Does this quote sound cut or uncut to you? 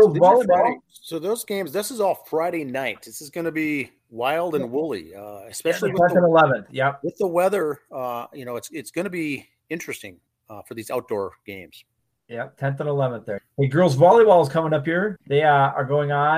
cut